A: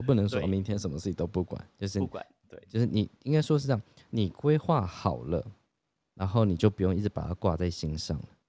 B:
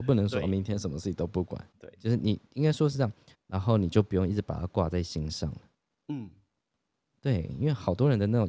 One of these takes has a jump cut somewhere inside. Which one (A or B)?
B